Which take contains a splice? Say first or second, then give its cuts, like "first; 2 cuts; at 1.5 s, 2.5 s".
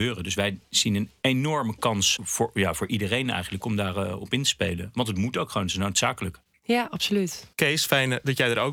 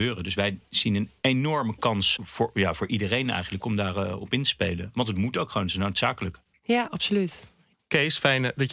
first; 1 cut; at 7.5 s